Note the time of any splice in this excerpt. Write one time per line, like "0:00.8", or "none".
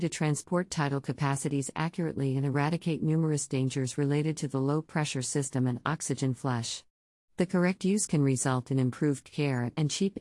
none